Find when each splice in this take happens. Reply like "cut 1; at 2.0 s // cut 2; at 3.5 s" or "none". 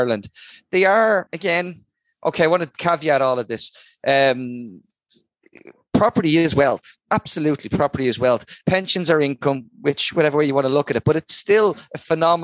cut 1; at 1.3 s